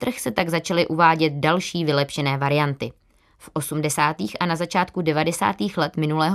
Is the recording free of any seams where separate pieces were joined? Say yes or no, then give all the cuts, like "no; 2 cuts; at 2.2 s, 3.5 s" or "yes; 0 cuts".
yes; 0 cuts